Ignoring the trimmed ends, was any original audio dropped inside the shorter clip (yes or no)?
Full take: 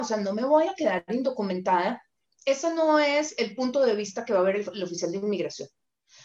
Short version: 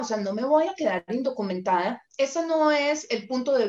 yes